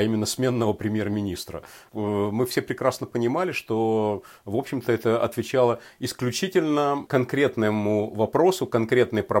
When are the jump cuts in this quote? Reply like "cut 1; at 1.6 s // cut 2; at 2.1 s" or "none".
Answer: none